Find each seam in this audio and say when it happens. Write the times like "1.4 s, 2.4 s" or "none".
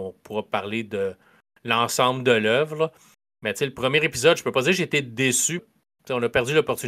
5.6 s